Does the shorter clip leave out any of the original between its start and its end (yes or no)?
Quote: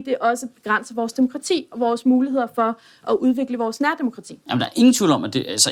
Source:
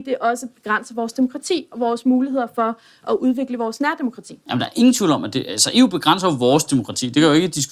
no